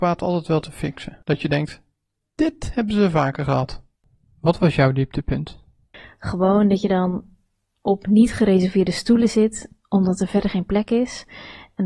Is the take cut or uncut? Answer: uncut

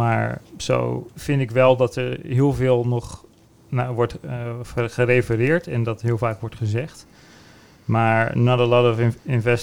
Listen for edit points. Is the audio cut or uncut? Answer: uncut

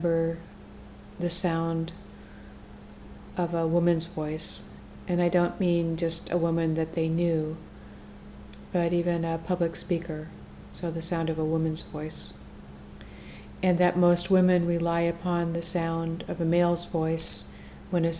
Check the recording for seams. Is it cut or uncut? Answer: uncut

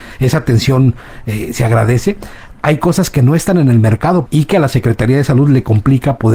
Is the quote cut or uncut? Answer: cut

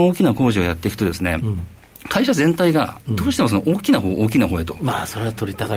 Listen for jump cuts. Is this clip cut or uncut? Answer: uncut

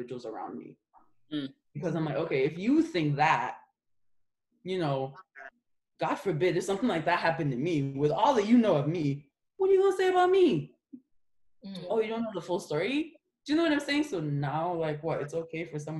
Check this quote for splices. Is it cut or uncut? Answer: uncut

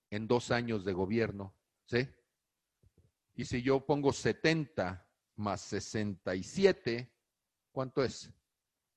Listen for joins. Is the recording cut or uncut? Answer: cut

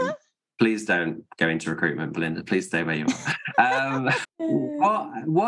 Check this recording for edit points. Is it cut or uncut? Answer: cut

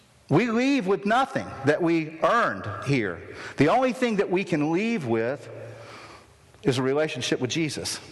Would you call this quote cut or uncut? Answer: uncut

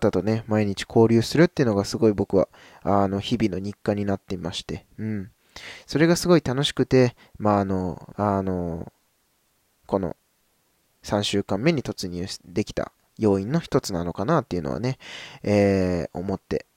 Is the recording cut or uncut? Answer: cut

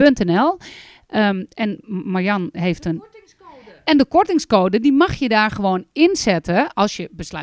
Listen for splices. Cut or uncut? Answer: uncut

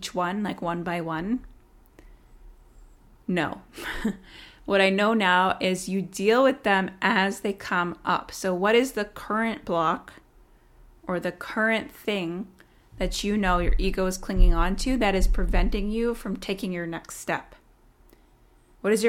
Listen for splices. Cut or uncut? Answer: uncut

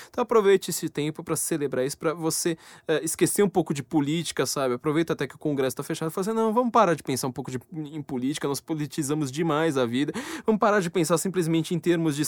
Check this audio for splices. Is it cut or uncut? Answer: uncut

